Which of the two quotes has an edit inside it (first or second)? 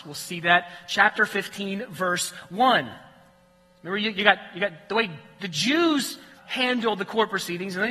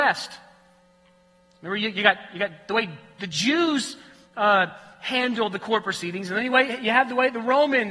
first